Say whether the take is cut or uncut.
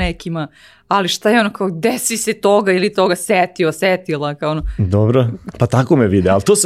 cut